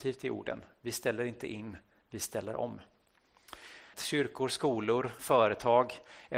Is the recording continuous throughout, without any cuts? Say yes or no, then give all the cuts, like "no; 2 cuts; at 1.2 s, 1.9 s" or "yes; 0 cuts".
no; 2 cuts; at 3.9 s, 5.2 s